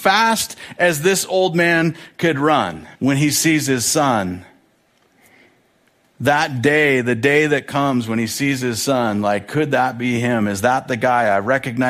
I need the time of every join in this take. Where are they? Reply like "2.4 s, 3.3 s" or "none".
3.0 s